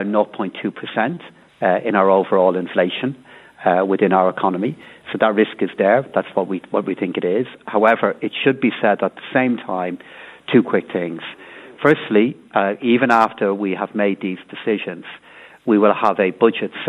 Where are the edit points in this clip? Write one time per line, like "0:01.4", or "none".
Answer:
none